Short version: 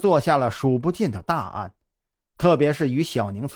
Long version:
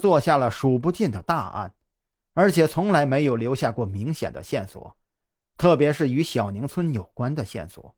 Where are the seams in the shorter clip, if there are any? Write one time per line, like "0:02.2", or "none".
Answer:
0:02.2